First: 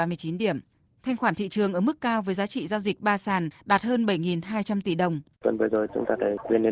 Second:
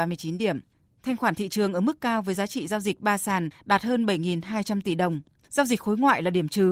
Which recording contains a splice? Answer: first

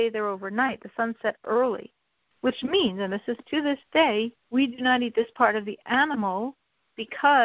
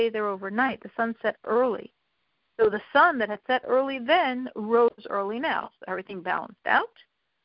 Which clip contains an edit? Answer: first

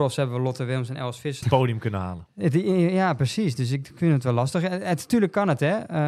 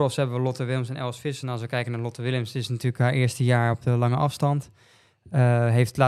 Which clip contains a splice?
first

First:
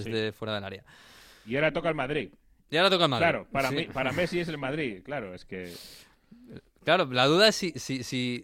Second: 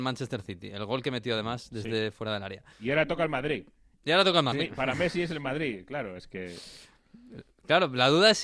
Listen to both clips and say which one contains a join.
second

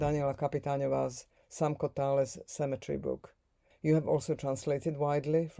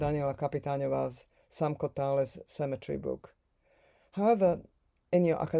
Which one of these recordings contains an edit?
first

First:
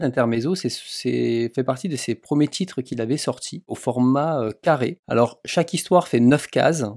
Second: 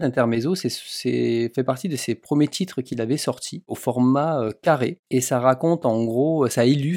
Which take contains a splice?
first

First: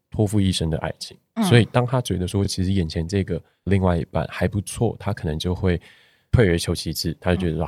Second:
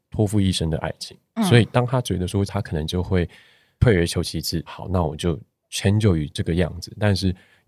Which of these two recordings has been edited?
second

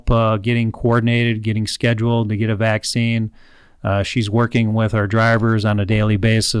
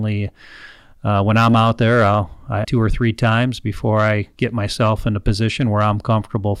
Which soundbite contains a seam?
second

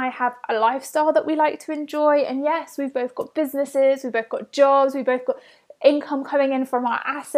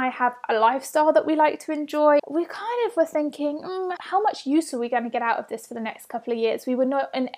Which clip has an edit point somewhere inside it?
second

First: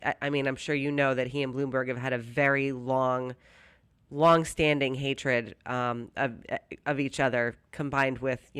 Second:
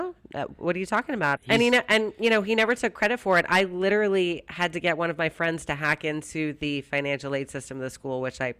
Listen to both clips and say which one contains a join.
second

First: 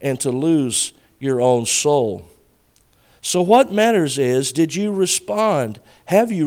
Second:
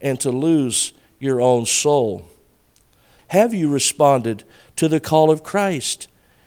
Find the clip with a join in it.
second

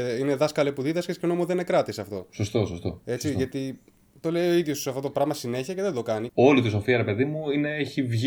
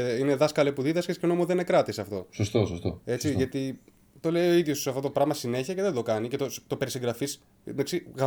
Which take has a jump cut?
first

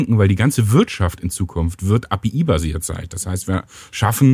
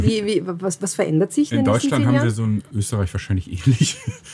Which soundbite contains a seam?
second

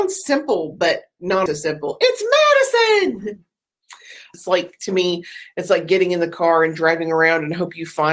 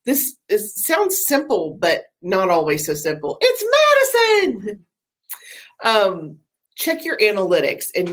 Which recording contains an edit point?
first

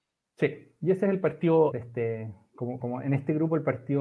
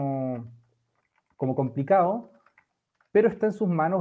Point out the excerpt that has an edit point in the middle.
first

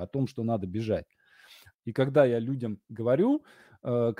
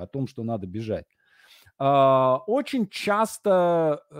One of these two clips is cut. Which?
first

